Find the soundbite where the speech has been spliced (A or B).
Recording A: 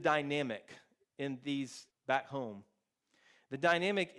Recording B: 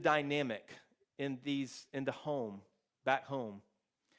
A